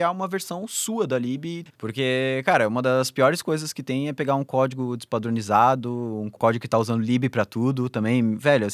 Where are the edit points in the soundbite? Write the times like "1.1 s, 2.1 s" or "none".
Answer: 1.7 s